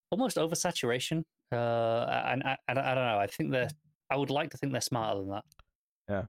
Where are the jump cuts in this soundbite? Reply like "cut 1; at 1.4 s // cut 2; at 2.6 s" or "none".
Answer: none